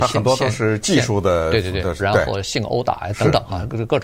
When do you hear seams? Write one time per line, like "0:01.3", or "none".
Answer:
0:02.0